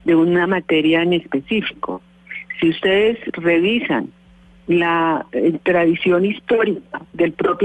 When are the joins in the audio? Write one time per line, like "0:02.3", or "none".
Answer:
none